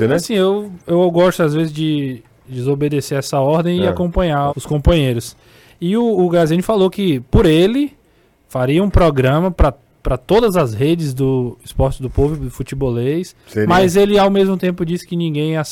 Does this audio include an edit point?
yes; 1 cut; at 4.5 s

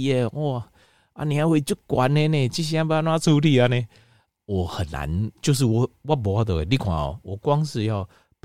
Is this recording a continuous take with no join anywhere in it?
no; 1 cut; at 5.4 s

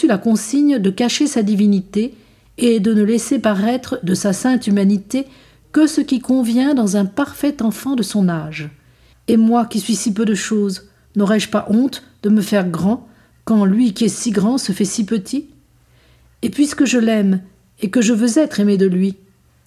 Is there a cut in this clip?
yes; 1 cut; at 9.1 s

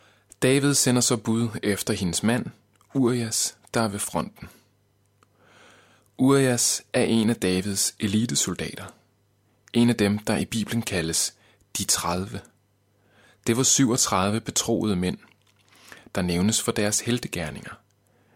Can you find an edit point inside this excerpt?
no; 0 cuts

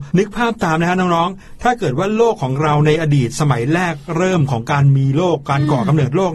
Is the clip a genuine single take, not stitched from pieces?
yes; 0 cuts

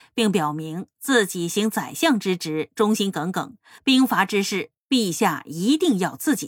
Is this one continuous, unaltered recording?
no; 1 cut; at 3.8 s

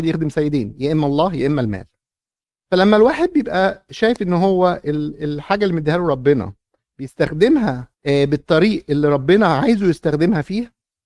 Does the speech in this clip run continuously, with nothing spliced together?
no; 1 cut; at 7.9 s

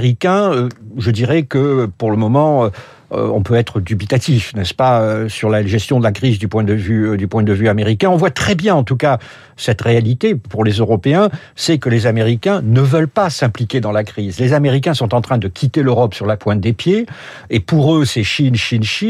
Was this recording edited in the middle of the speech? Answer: no; 0 cuts

